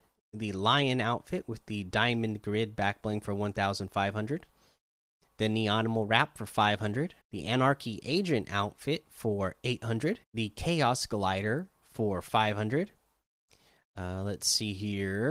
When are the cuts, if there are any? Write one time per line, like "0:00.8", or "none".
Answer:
0:07.2
0:10.2